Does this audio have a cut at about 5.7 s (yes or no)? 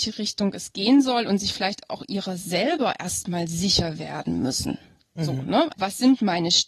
yes